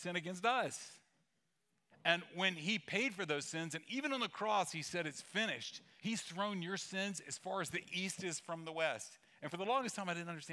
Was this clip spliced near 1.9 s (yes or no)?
yes